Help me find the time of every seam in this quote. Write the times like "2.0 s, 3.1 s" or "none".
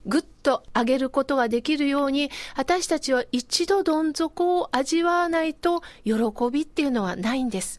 none

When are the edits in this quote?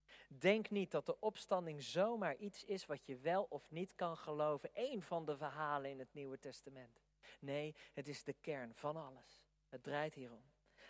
none

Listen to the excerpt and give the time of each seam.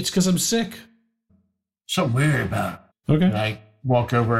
1.3 s, 2.9 s

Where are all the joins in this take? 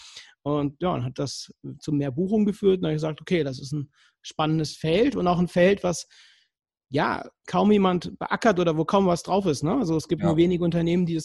none

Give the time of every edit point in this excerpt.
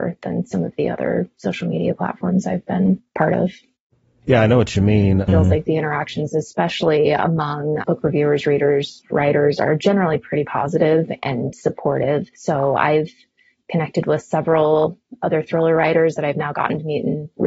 4.2 s, 5.3 s

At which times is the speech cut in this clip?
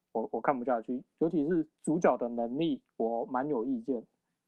none

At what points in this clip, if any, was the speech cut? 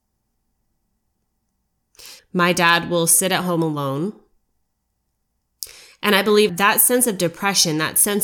2.2 s, 6.5 s

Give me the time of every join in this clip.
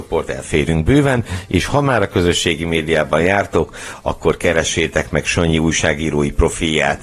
none

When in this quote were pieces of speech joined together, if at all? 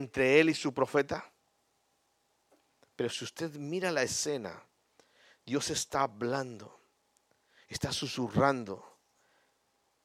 2.9 s

